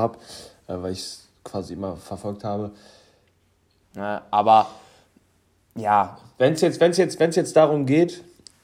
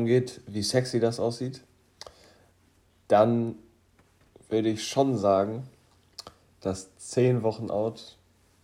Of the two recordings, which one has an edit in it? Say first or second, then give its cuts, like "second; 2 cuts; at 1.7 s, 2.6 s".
first; 1 cut; at 3.8 s